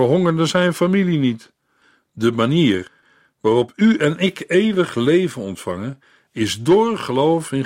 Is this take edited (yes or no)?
no